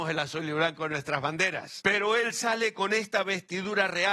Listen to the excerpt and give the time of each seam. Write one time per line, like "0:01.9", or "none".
0:01.8

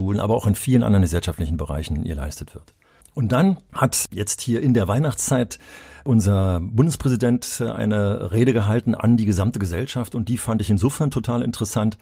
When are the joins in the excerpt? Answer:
none

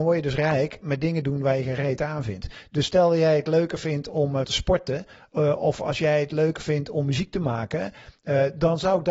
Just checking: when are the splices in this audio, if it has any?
0:04.4

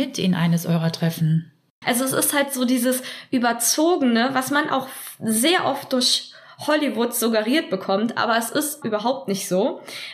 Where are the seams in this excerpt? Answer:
0:01.8
0:08.8

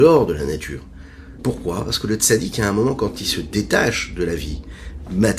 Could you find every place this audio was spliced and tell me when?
0:01.4

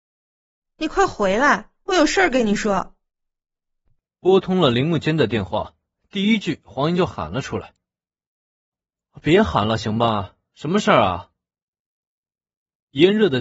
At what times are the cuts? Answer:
none

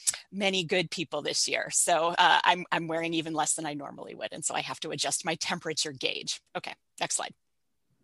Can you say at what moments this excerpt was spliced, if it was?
0:06.5

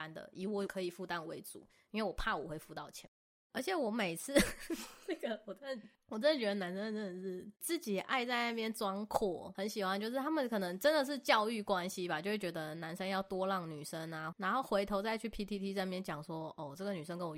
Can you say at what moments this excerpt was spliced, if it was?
0:03.5
0:14.3

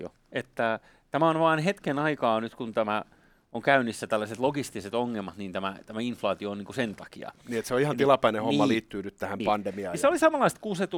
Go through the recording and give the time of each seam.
none

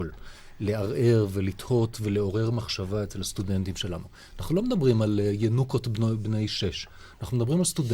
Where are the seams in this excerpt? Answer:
none

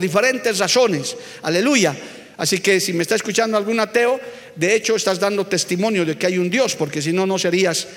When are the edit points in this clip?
0:02.3

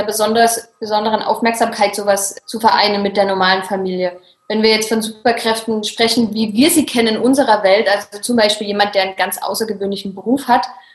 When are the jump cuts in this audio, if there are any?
none

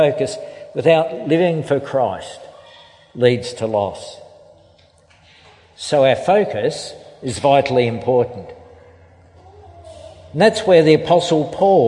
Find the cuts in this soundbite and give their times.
none

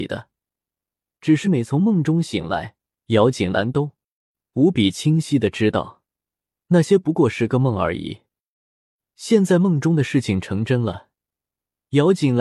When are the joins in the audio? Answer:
0:01.4

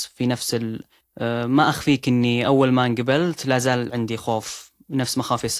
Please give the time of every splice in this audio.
0:01.0

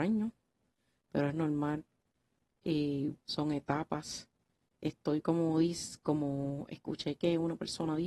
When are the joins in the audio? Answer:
0:03.2

